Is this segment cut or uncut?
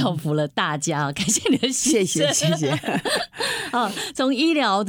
uncut